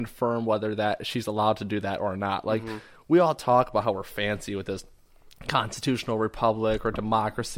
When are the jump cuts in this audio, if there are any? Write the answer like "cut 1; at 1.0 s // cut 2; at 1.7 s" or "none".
none